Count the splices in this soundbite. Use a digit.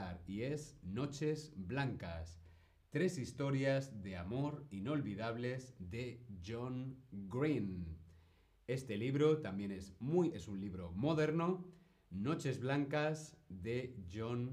1